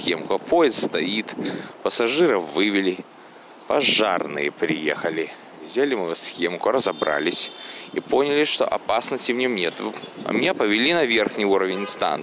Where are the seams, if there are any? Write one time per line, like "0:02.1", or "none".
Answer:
none